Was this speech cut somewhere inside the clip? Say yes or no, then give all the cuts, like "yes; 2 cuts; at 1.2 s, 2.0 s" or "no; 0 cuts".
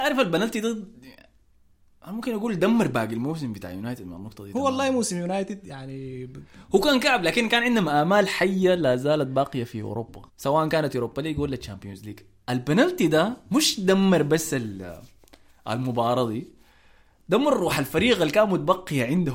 yes; 1 cut; at 10.3 s